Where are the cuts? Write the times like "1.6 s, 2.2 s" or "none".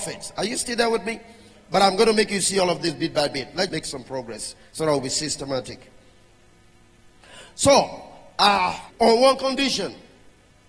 3.7 s, 8.9 s